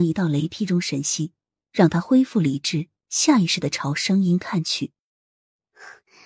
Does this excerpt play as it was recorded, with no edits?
yes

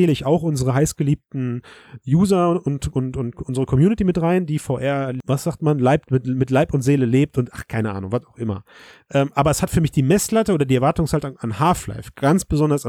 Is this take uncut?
yes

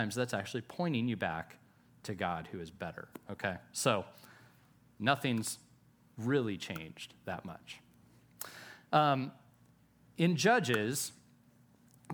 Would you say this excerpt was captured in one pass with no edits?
yes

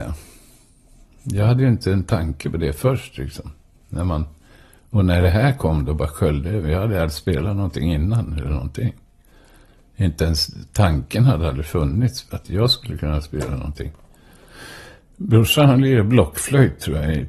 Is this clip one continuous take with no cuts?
no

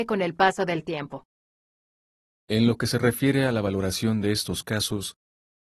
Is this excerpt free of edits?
yes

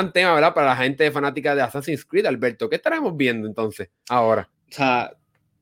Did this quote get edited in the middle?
yes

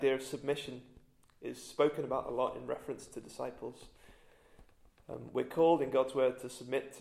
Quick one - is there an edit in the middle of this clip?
no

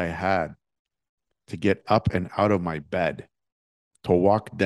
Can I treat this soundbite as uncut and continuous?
yes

